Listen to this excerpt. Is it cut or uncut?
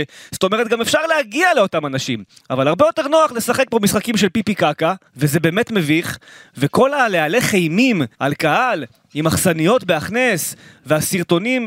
cut